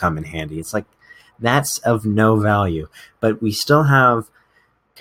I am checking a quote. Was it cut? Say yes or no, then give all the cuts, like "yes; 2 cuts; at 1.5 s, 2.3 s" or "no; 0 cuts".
no; 0 cuts